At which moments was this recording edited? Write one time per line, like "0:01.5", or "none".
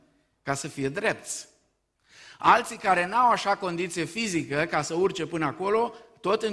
none